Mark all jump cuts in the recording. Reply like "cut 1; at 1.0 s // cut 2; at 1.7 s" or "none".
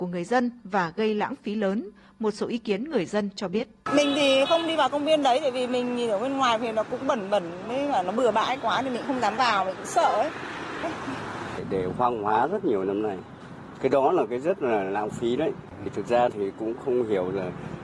cut 1; at 10.8 s

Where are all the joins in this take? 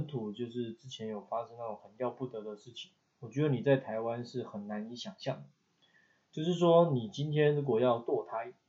none

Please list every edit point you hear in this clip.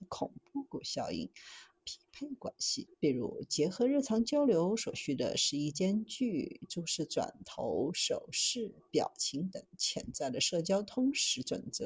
cut 1; at 1.8 s

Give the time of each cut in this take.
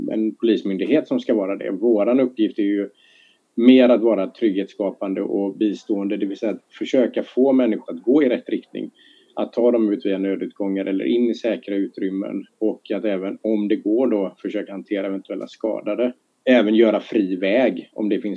cut 1; at 7.9 s

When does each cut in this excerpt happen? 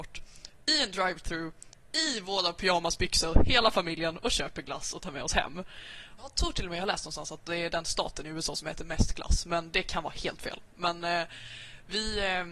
cut 1; at 6.2 s

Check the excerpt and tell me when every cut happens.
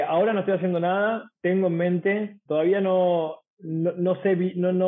cut 1; at 1.4 s // cut 2; at 2.5 s

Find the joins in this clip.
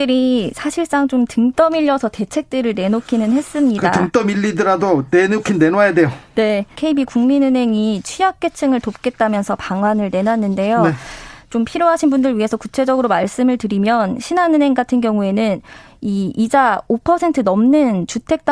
cut 1; at 6.7 s

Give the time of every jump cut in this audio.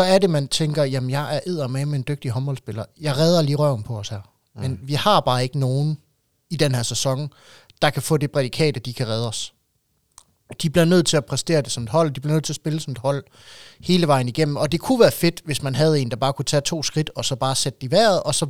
none

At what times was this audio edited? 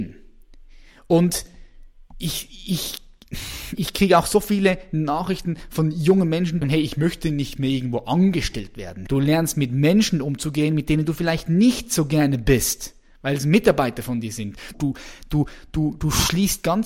cut 1; at 6.6 s // cut 2; at 9.1 s // cut 3; at 14.7 s

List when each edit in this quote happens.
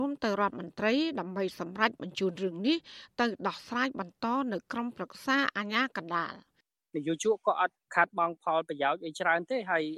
none

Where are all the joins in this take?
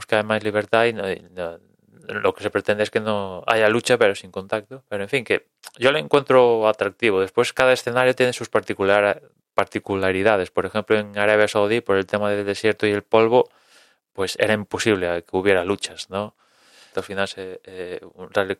cut 1; at 16.9 s

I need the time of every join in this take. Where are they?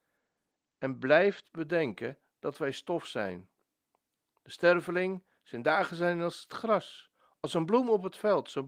none

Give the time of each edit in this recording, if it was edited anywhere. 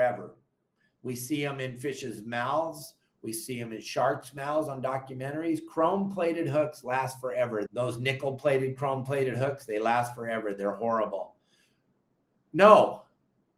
cut 1; at 7.7 s

